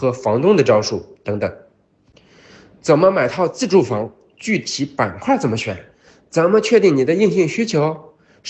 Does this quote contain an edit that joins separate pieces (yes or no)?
no